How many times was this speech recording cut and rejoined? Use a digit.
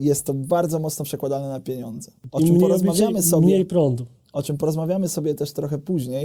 1